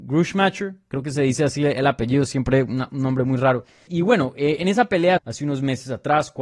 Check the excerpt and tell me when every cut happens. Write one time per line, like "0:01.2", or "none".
0:03.9
0:05.2